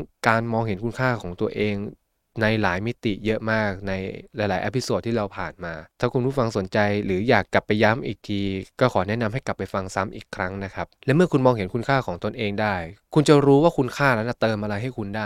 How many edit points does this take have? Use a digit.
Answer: 2